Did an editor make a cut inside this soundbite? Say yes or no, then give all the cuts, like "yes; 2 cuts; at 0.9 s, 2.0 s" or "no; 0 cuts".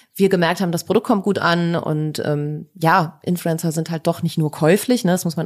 no; 0 cuts